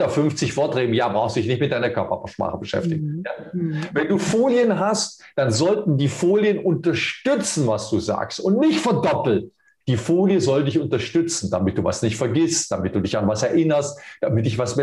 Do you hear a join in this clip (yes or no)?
yes